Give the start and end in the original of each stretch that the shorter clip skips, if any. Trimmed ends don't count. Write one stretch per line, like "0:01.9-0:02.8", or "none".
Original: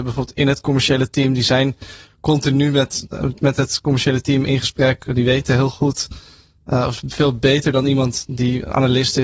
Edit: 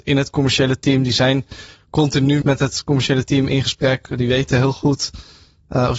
0:02.7-0:03.4